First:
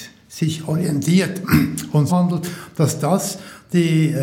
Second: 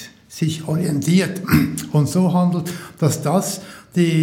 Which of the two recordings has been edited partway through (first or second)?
first